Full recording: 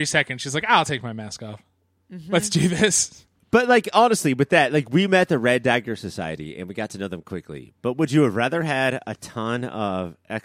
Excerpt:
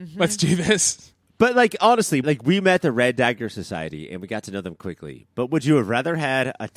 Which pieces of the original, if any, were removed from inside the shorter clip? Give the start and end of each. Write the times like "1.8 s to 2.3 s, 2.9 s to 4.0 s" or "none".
4.4 s to 4.7 s